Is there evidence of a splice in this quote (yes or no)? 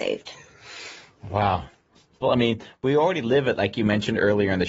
yes